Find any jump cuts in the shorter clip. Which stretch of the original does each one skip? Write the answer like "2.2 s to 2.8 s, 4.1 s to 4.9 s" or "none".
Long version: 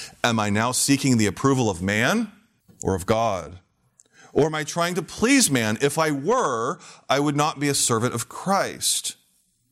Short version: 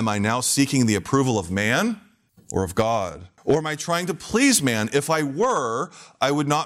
3.7 s to 4.3 s